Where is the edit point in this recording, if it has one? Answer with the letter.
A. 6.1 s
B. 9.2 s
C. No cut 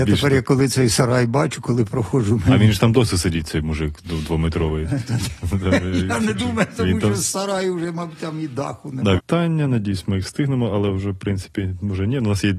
B